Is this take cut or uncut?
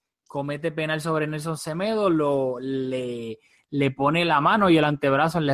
uncut